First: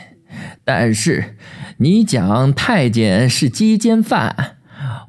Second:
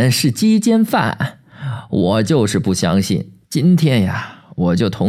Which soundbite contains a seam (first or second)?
second